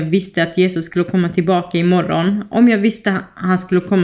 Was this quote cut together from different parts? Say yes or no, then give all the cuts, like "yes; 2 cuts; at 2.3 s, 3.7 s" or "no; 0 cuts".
no; 0 cuts